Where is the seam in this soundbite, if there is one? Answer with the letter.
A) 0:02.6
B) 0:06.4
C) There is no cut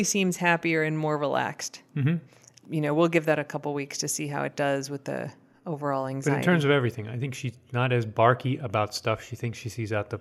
A